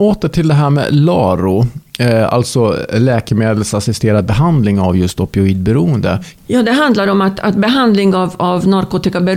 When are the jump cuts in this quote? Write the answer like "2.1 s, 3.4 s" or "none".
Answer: 6.4 s